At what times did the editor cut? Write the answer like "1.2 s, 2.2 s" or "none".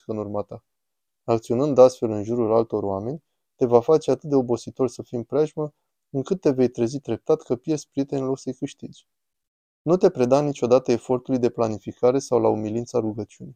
1.1 s, 9.7 s